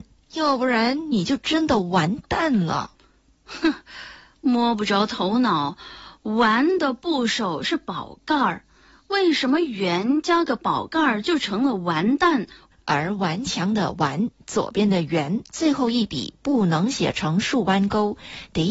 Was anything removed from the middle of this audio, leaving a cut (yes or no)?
yes